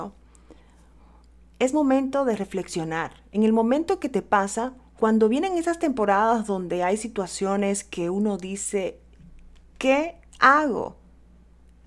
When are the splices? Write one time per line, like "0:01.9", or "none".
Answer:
none